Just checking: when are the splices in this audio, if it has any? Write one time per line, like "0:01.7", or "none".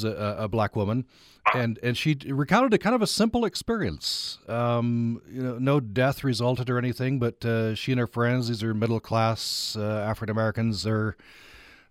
none